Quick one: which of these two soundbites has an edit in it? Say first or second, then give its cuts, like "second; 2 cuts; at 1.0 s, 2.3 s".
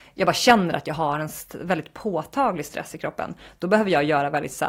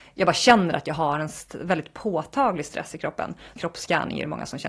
second; 1 cut; at 3.6 s